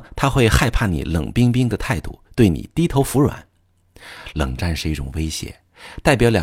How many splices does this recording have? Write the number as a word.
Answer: zero